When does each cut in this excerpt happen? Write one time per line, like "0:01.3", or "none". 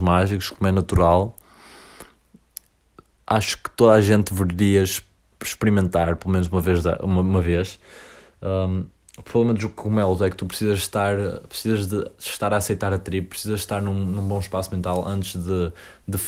none